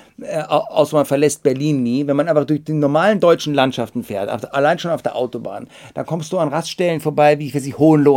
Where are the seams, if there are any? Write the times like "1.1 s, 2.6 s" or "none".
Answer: none